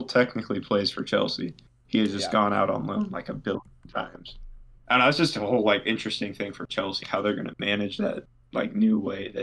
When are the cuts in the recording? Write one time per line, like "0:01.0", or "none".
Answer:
0:04.8
0:07.0